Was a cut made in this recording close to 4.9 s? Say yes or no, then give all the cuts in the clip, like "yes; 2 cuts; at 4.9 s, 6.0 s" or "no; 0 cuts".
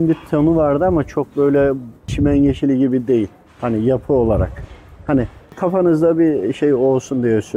no; 1 cut; at 3.5 s